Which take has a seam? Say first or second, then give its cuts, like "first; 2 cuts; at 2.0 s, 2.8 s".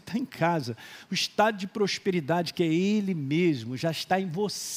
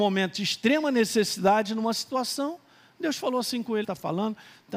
second; 1 cut; at 3.8 s